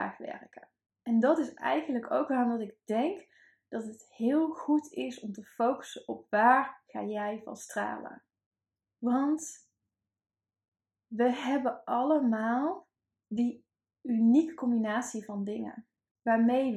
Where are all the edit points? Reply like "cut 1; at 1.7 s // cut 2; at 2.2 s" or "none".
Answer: none